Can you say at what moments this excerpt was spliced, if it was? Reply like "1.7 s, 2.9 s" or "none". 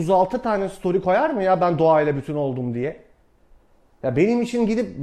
none